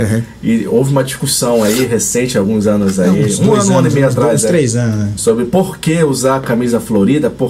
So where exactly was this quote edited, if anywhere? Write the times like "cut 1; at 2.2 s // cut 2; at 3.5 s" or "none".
none